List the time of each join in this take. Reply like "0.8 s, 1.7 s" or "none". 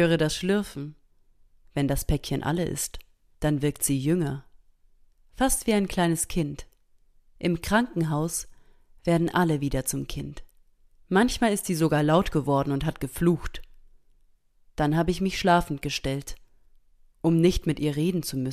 3.3 s, 10.9 s